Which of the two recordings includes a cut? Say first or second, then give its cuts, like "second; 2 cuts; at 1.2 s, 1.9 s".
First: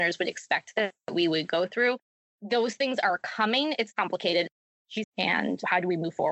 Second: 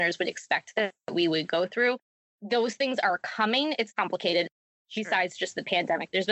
first; 1 cut; at 5.0 s